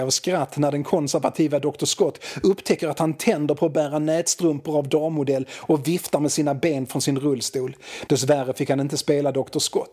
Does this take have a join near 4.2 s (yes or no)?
no